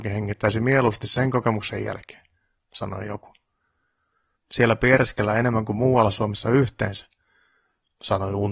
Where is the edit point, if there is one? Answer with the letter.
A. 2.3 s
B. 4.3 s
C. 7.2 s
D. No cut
B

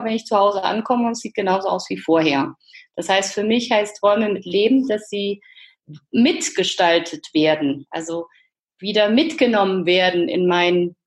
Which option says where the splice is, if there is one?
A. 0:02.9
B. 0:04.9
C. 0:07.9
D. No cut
D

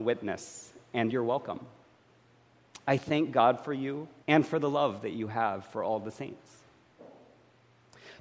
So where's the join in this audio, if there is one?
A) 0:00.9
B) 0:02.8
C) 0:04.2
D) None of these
C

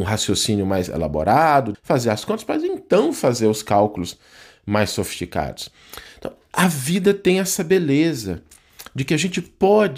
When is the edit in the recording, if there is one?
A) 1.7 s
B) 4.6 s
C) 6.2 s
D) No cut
A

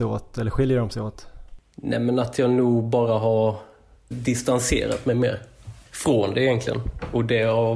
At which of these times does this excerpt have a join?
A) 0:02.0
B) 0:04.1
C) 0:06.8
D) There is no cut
B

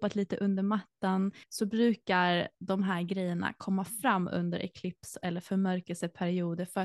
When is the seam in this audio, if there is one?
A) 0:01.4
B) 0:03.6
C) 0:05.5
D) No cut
A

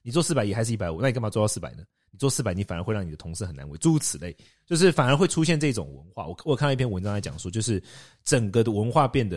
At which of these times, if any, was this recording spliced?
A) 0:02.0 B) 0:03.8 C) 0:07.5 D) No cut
D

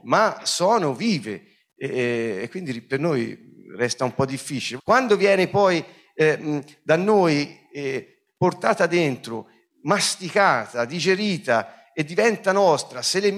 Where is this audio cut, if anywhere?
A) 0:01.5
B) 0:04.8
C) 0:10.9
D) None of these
B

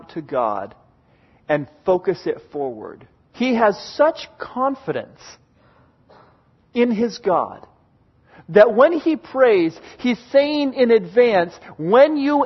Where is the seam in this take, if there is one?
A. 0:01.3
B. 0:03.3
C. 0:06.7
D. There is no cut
B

